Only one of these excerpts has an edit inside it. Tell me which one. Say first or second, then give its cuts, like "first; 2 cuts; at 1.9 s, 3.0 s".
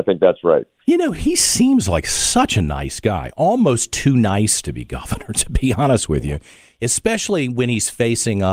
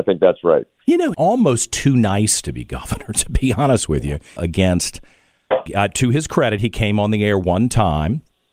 second; 3 cuts; at 1.1 s, 4.4 s, 5.7 s